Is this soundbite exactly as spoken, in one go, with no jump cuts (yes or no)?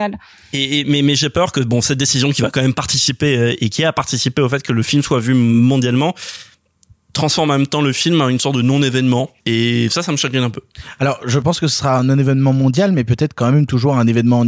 no